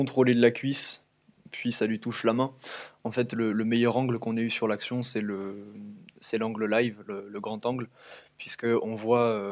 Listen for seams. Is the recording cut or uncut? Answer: uncut